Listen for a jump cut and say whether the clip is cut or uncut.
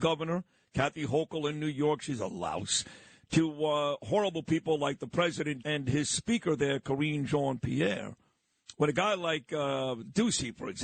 cut